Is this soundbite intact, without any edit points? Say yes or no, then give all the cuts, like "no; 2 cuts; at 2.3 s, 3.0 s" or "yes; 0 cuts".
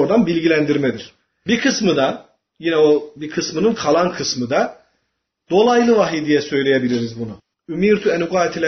no; 1 cut; at 7.5 s